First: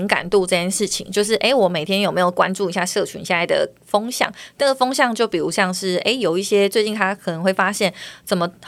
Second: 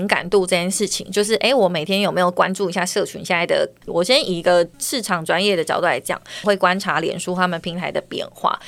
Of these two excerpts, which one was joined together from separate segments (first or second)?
second